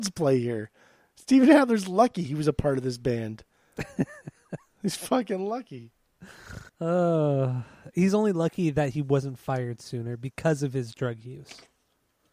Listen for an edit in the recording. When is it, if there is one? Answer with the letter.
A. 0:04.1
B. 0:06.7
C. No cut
B